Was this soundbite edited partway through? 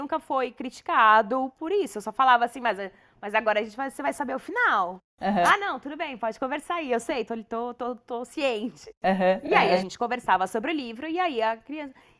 no; 0 cuts

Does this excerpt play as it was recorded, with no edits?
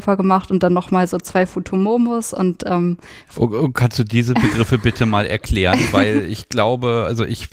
yes; 0 cuts

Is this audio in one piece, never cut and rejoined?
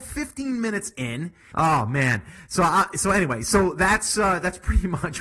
no; 1 cut; at 1.5 s

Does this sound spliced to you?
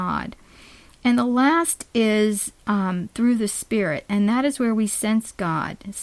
no; 0 cuts

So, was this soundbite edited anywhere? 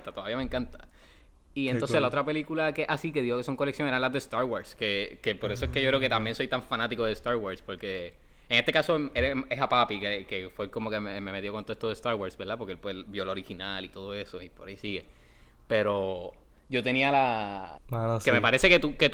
yes; 1 cut; at 17.8 s

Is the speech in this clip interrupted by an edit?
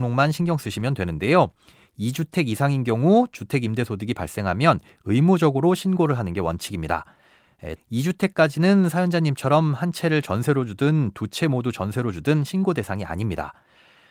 yes; 1 cut; at 7.8 s

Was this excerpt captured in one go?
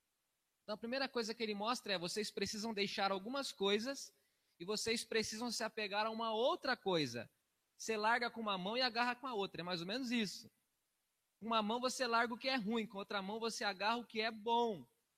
yes; 0 cuts

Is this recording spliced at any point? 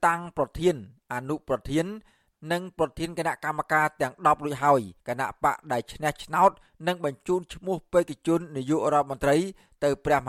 yes; 1 cut; at 5.0 s

